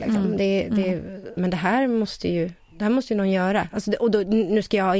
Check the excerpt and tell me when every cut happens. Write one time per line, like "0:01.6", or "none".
0:01.4